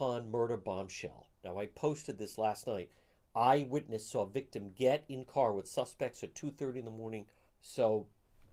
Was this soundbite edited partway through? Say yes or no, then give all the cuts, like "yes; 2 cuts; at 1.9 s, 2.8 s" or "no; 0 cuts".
yes; 1 cut; at 7.5 s